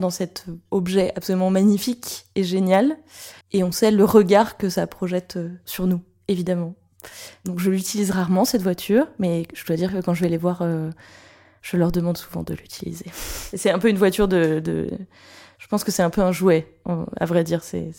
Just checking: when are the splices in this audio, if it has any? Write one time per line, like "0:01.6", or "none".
0:03.4